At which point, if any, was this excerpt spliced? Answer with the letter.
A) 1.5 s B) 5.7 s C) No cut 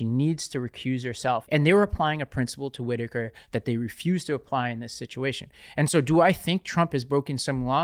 A